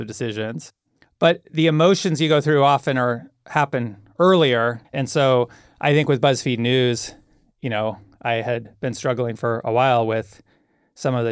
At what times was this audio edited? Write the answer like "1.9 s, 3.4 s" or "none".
4.8 s